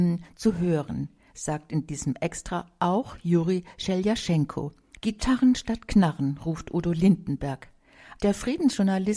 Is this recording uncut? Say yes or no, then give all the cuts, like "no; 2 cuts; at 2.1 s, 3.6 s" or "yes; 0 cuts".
no; 2 cuts; at 4.9 s, 8.1 s